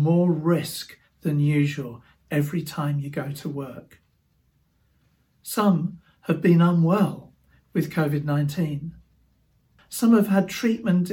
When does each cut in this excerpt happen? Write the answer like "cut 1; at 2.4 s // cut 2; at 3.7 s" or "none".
cut 1; at 9.8 s